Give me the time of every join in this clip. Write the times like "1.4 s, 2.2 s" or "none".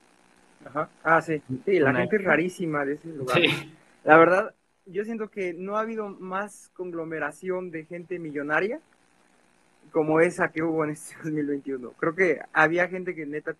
none